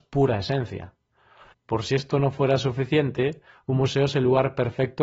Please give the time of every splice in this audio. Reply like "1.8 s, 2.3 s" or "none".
1.5 s